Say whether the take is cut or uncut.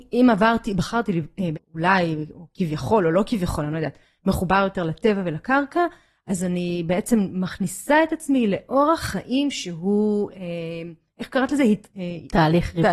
cut